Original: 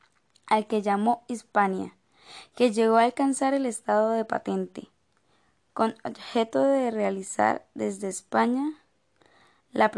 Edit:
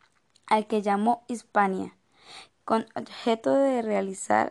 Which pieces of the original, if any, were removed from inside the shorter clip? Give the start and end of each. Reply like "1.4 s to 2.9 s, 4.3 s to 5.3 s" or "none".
2.5 s to 5.6 s

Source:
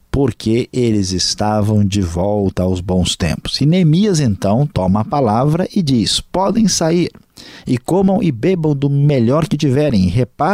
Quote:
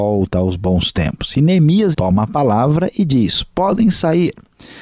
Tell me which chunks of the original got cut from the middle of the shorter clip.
4.2 s to 4.7 s

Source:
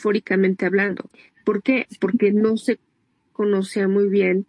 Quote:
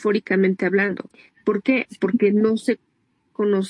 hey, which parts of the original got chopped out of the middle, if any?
none

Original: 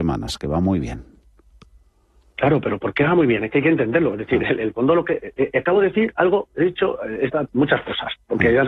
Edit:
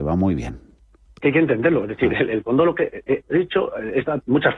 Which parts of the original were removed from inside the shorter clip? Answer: 1.7 s to 3.5 s, 5.5 s to 6.5 s

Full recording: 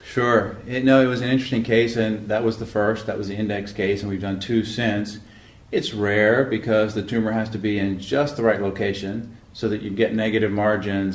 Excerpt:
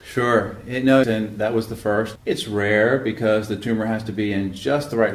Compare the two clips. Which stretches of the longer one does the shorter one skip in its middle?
1.0 s to 1.9 s, 3.1 s to 5.6 s

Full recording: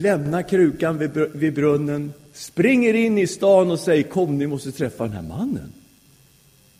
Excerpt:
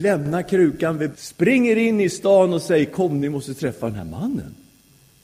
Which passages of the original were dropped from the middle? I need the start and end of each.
1.1 s to 2.3 s

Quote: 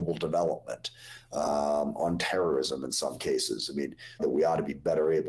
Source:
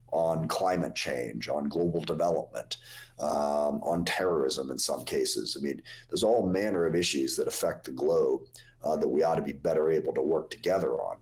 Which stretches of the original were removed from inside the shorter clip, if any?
6.1 s to 9.0 s

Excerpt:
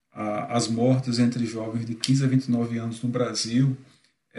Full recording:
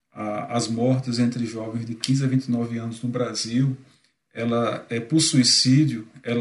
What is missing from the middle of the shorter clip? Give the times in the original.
none

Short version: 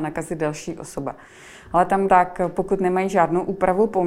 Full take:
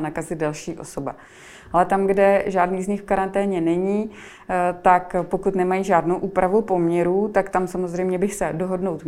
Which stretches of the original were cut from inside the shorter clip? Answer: 2.1 s to 4.8 s

